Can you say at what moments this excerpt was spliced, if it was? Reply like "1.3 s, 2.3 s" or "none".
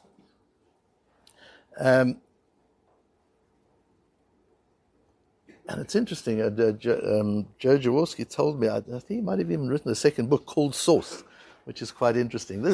none